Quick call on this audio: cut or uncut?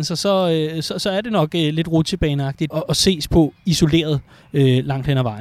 cut